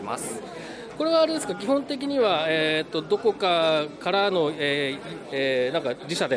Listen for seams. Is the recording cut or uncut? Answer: cut